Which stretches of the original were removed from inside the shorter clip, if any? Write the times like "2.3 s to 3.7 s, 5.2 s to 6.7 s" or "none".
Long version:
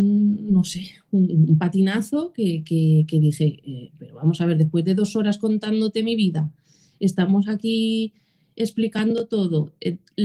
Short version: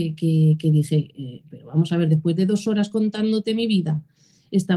none